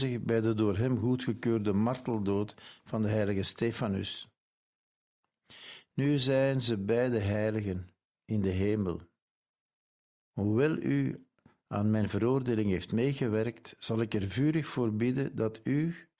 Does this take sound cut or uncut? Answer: uncut